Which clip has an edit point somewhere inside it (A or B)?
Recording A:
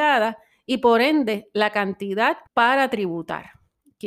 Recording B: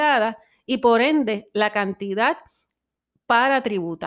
A